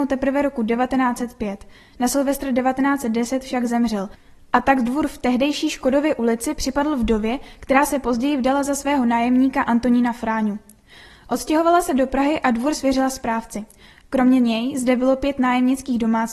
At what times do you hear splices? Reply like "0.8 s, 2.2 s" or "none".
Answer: none